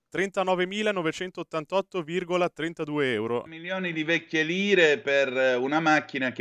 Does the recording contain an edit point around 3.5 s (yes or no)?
yes